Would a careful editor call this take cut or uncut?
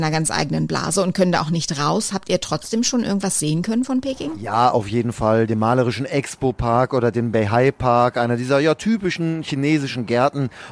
uncut